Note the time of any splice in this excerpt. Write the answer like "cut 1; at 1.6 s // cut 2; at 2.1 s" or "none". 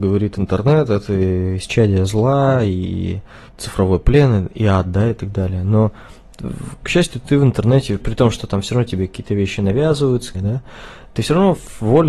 cut 1; at 8.0 s // cut 2; at 10.3 s